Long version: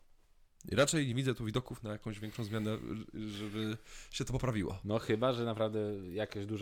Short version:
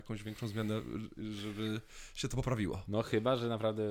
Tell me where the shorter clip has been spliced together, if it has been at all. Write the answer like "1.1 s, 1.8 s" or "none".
none